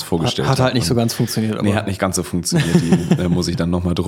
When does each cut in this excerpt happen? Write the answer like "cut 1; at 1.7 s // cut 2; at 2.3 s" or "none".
none